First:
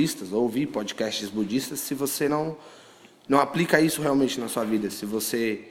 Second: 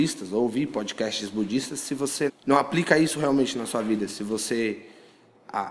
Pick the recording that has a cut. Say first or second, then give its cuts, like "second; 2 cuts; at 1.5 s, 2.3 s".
second; 1 cut; at 2.3 s